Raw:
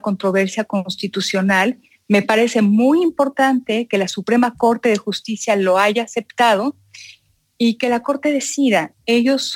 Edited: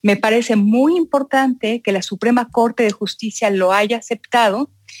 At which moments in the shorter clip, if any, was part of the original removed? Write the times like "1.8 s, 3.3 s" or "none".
none